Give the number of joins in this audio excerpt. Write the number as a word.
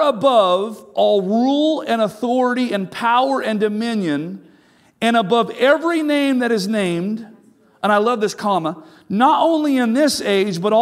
zero